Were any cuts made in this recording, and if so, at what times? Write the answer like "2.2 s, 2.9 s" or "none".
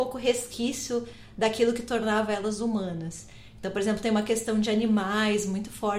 none